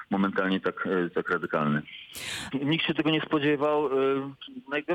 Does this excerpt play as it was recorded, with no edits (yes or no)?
no